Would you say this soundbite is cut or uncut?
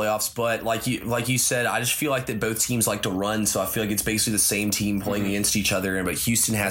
uncut